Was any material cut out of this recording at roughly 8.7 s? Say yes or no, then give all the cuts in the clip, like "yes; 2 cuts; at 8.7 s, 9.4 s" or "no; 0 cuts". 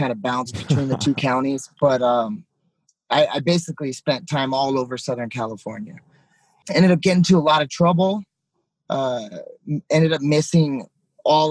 no; 1 cut; at 6.6 s